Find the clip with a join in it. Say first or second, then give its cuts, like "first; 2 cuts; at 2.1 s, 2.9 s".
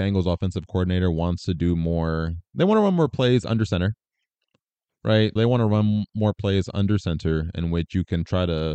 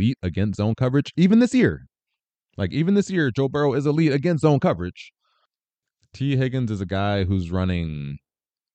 first; 1 cut; at 5.4 s